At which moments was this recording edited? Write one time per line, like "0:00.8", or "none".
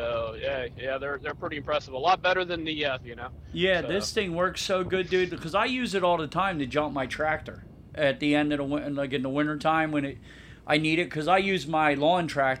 0:03.0